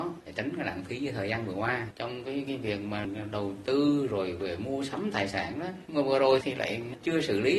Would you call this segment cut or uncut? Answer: cut